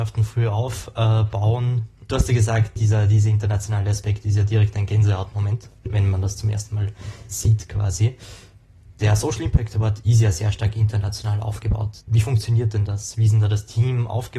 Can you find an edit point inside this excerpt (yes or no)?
no